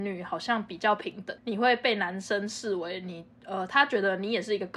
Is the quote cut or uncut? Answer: uncut